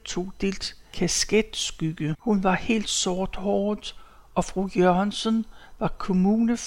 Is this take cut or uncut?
cut